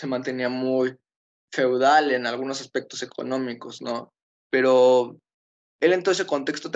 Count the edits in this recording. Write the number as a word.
one